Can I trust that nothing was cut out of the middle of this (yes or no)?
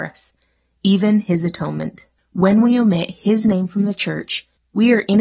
yes